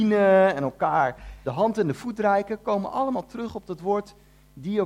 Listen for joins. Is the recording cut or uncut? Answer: cut